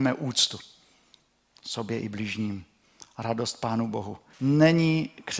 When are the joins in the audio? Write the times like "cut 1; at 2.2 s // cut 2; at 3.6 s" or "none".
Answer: cut 1; at 4.3 s